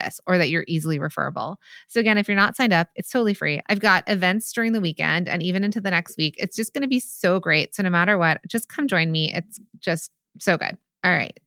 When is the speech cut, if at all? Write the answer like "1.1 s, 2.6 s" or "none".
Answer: 3.6 s